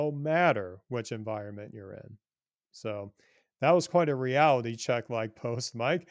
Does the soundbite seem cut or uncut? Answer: uncut